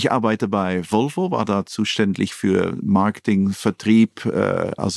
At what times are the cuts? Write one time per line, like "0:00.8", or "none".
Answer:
none